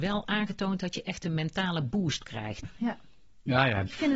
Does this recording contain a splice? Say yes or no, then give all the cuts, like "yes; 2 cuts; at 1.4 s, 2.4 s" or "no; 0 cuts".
yes; 1 cut; at 2.6 s